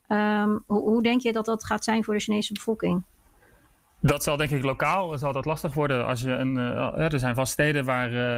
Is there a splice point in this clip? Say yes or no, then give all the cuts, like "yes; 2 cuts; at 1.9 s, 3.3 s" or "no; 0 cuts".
no; 0 cuts